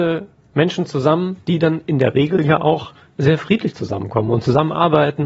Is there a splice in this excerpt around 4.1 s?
no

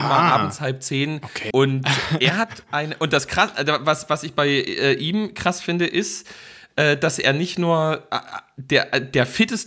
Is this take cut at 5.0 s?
no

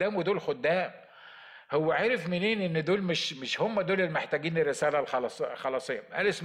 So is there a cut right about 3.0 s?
no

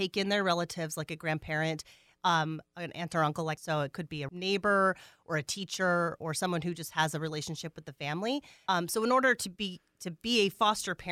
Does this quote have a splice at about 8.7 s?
yes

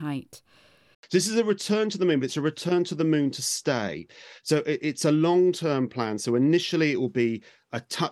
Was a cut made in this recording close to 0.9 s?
yes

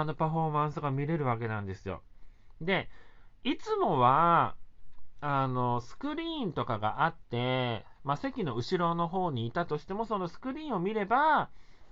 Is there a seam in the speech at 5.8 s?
no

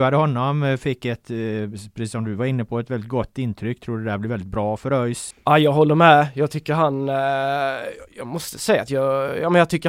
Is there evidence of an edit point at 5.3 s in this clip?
yes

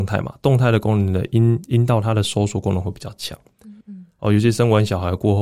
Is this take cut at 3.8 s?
yes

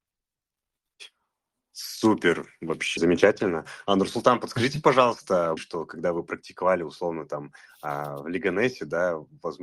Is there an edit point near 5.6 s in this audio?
yes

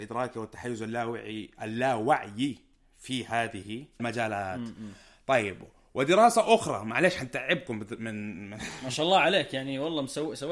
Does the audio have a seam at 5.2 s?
no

